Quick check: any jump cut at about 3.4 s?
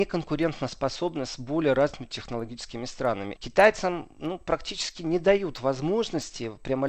yes; 1 cut; at 3.4 s

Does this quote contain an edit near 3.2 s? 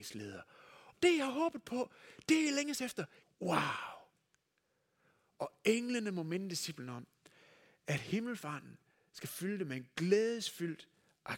yes; 2 cuts; at 0.9 s, 3.2 s

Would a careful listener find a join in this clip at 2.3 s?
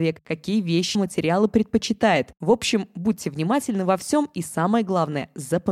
no; 1 cut; at 0.9 s

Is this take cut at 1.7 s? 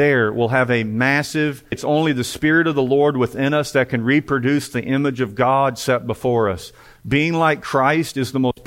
yes; 1 cut; at 1.7 s

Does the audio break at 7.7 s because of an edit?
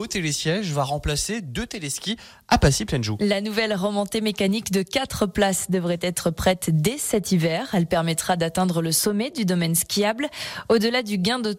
no; 0 cuts

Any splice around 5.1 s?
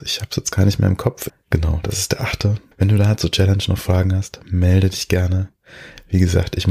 no; 2 cuts; at 1.3 s, 2.7 s

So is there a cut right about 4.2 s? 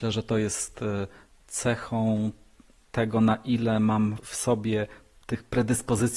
yes; 1 cut; at 4.2 s

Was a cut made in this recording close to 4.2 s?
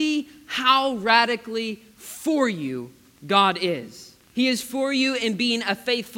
yes; 1 cut; at 4.2 s

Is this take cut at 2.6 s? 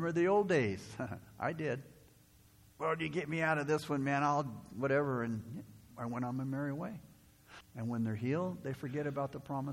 no; 2 cuts; at 5.9 s, 7.6 s

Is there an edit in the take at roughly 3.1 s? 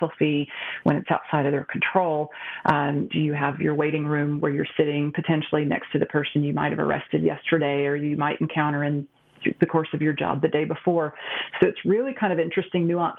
yes; 2 cuts; at 3.1 s, 11.6 s

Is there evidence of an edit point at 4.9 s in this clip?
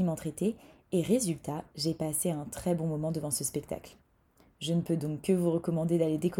no; 0 cuts

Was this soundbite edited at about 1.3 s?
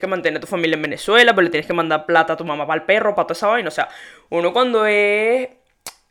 no; 1 cut; at 3.2 s

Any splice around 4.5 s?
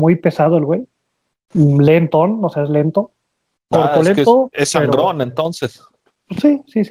yes; 1 cut; at 4.5 s

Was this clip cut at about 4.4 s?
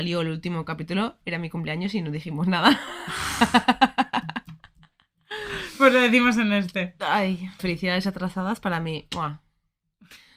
no; 1 cut; at 7.6 s

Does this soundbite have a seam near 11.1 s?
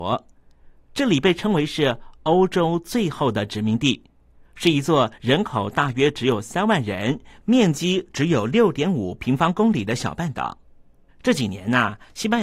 yes; 1 cut; at 11.1 s

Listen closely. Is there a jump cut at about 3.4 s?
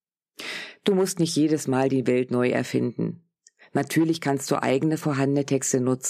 no; 0 cuts

